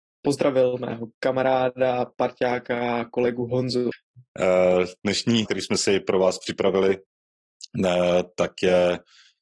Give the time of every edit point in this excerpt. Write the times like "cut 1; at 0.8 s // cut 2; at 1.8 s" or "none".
cut 1; at 3.9 s // cut 2; at 5.5 s